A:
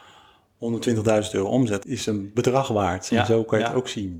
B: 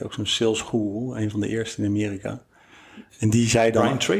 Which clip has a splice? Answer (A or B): A